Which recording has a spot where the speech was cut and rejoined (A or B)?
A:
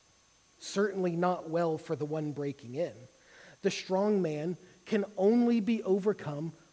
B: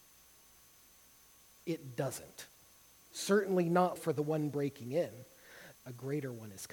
B